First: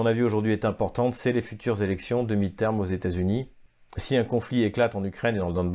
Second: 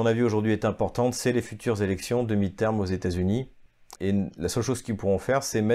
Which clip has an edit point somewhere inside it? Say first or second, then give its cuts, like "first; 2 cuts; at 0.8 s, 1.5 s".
second; 1 cut; at 4.0 s